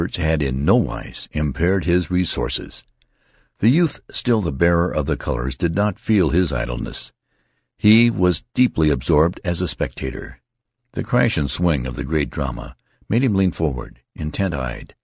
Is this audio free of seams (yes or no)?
yes